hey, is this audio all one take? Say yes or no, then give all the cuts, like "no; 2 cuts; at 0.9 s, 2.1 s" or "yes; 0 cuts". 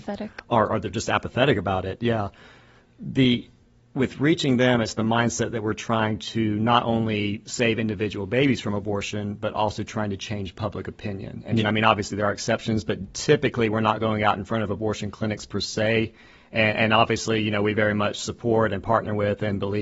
no; 1 cut; at 11.6 s